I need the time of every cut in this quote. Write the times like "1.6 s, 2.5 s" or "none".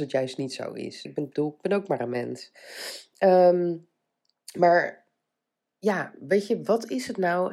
1.0 s